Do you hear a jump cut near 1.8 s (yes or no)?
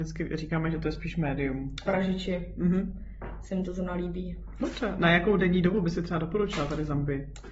yes